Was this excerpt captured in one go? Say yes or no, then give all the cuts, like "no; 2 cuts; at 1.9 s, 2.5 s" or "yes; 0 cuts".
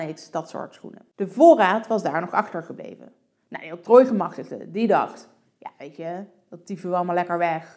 yes; 0 cuts